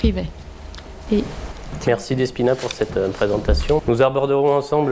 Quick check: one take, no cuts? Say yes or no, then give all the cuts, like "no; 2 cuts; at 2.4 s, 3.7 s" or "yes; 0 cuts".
no; 2 cuts; at 1.1 s, 3.8 s